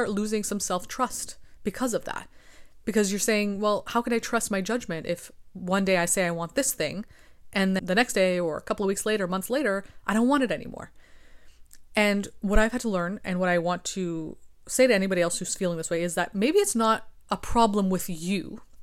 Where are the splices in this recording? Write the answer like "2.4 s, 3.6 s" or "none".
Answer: 7.8 s

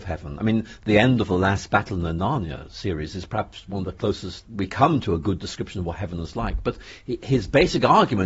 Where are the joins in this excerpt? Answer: 4.4 s

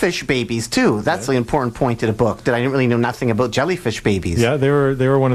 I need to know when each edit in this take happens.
1.3 s

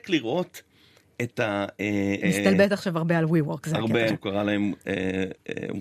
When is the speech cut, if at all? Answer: 2.2 s, 4.1 s

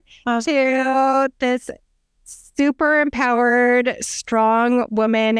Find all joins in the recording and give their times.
none

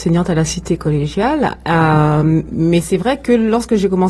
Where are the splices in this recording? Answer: none

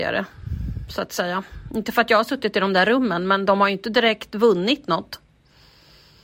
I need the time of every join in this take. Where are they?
none

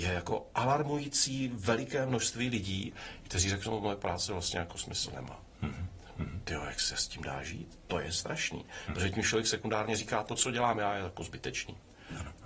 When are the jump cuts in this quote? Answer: none

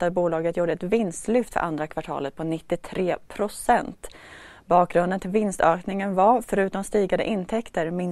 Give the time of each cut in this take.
none

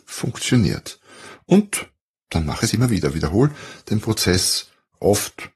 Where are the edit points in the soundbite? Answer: none

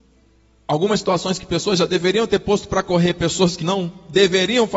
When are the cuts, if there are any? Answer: 3.6 s

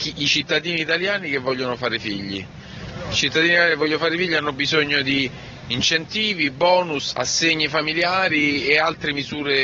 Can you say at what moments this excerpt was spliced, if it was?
7.1 s

